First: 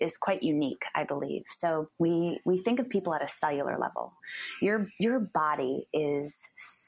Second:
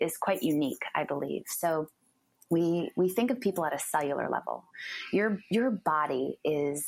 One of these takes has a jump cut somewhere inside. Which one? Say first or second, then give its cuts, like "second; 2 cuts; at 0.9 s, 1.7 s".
first; 1 cut; at 1.9 s